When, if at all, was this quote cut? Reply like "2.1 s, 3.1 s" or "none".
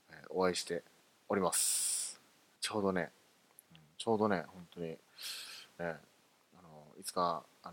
2.6 s, 5.8 s

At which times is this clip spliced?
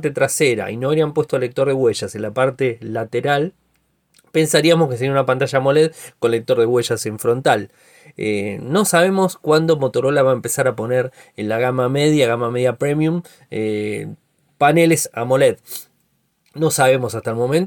none

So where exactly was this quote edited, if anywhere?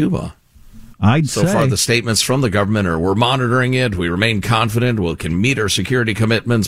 0.9 s

